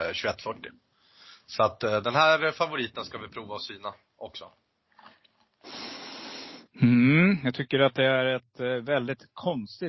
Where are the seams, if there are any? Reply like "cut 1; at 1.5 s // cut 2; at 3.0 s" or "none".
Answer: none